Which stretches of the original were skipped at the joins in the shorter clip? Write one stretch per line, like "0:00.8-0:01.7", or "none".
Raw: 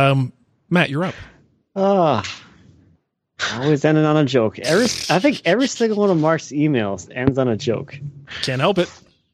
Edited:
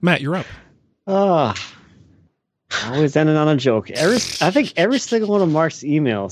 none